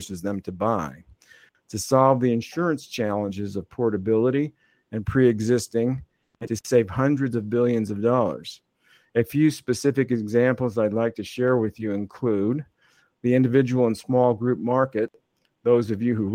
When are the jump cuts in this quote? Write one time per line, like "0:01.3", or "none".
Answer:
none